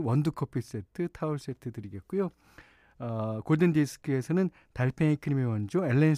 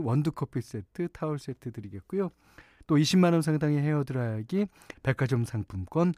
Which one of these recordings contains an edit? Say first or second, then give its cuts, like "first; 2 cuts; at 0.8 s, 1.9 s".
second; 2 cuts; at 2.8 s, 4.9 s